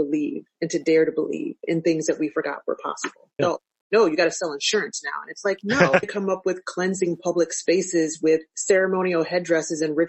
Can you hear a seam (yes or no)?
yes